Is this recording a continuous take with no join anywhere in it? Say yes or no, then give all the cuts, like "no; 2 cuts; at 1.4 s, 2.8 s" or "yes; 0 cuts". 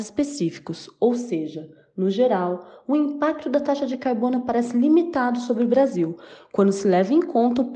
yes; 0 cuts